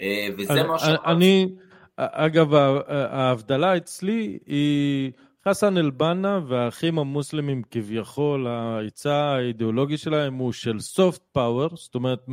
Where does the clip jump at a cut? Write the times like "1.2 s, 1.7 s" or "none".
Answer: none